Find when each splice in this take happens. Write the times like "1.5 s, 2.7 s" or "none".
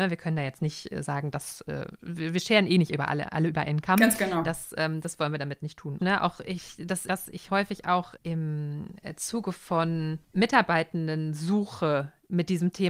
6.0 s, 7.1 s